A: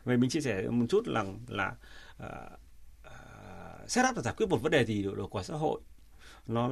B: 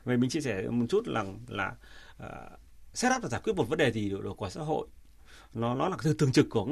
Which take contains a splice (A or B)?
B